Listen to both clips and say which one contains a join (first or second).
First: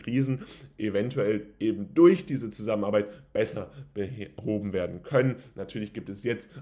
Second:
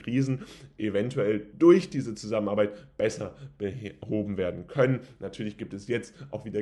second